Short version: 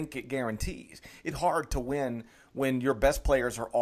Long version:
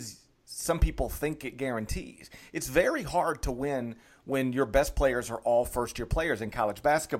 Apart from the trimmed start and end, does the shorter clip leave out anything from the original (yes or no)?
yes